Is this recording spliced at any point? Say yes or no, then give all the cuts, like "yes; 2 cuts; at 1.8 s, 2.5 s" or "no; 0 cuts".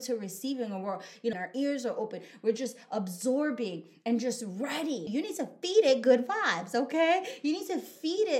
yes; 2 cuts; at 1.3 s, 5.1 s